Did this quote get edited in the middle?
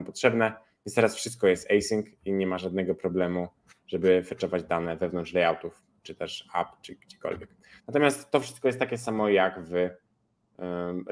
yes; 1 cut; at 7.8 s

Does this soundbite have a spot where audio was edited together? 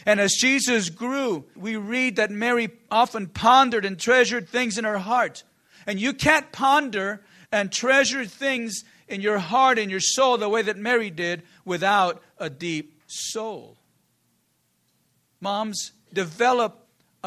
yes; 1 cut; at 1.6 s

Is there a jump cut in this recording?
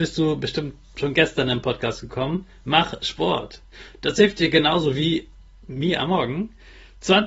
no; 0 cuts

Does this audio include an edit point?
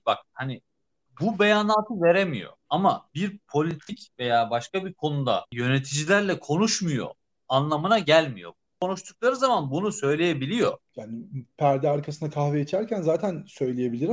no; 0 cuts

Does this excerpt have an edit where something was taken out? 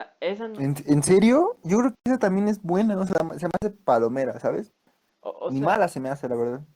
yes; 1 cut; at 5.1 s

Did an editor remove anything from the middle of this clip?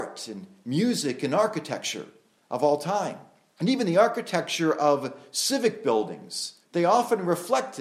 yes; 2 cuts; at 3.6 s, 6.6 s

